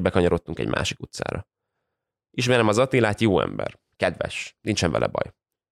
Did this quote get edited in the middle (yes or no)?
no